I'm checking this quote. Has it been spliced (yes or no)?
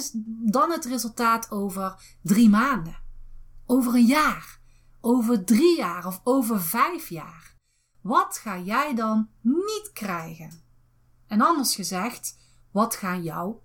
no